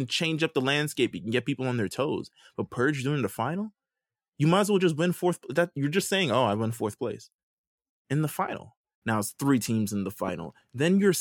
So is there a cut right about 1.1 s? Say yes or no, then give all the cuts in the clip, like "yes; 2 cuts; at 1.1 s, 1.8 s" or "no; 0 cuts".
no; 1 cut; at 9.0 s